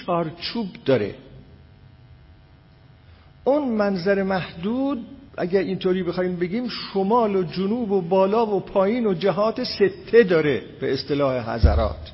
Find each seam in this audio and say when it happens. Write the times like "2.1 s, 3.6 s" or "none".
5.3 s